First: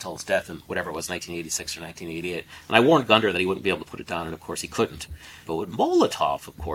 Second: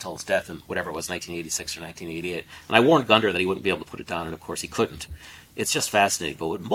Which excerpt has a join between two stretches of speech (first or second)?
first